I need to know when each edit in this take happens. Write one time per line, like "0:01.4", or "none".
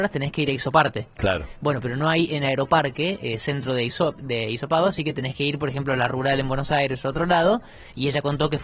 none

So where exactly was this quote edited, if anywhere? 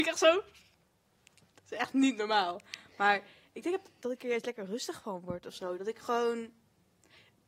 none

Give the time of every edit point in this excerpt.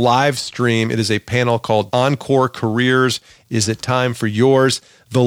none

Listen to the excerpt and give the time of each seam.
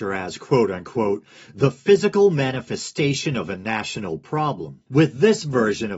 0:04.9

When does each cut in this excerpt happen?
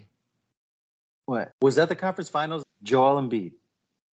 0:01.5
0:02.6

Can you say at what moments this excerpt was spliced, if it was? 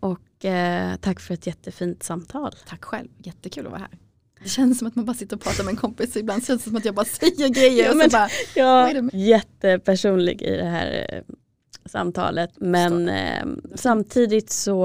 0:09.1
0:12.5

